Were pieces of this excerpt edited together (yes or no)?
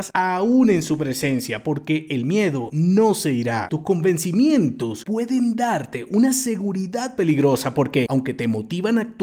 yes